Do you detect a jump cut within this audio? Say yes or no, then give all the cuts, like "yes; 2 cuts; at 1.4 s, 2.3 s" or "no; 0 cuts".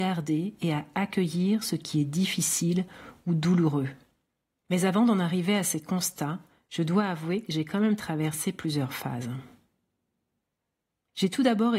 yes; 1 cut; at 4.6 s